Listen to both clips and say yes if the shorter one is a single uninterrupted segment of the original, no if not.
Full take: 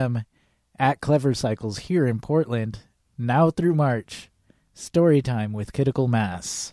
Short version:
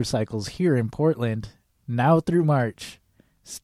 yes